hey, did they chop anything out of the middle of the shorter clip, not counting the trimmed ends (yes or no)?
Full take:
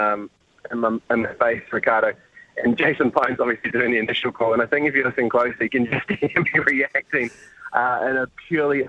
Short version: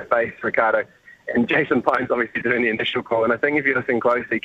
no